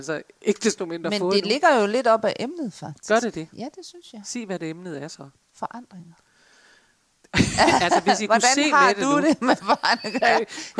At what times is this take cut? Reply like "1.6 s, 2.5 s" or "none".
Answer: none